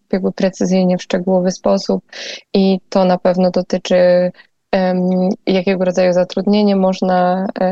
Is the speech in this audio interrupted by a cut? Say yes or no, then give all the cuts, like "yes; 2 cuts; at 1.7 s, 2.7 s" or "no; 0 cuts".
yes; 1 cut; at 5.4 s